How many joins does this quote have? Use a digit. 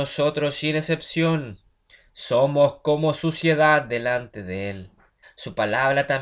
1